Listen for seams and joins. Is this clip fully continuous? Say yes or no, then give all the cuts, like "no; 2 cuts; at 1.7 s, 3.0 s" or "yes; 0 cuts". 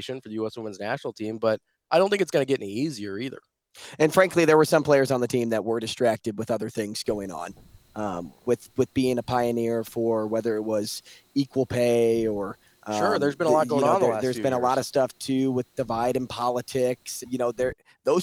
no; 1 cut; at 17.2 s